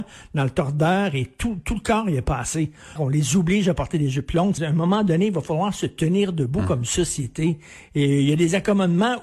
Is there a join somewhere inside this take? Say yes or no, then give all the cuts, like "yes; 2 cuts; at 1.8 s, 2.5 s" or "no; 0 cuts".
yes; 2 cuts; at 3.0 s, 4.6 s